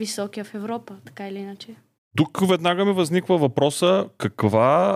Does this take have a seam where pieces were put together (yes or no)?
no